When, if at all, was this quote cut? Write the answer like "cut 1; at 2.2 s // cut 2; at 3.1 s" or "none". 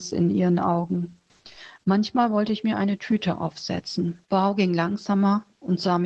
cut 1; at 4.2 s